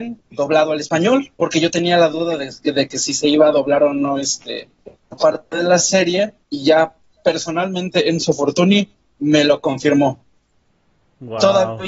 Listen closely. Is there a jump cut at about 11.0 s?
no; 2 cuts; at 1.4 s, 6.4 s

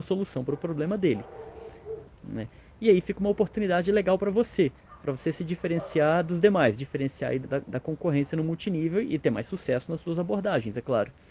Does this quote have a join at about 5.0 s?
no; 2 cuts; at 2.0 s, 7.4 s

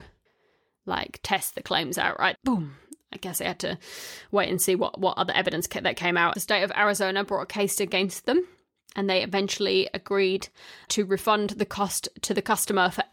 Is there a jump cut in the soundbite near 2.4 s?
yes; 3 cuts; at 2.4 s, 6.3 s, 10.9 s

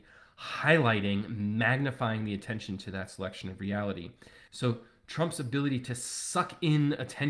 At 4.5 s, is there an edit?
yes; 1 cut; at 4.5 s

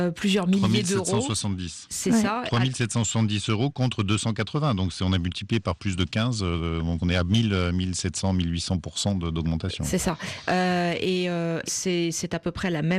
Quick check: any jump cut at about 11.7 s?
yes; 1 cut; at 11.7 s

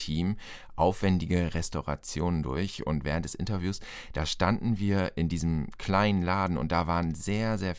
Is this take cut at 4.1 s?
no; 0 cuts

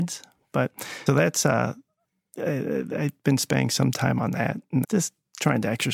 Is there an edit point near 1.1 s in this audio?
yes; 2 cuts; at 1.1 s, 4.8 s

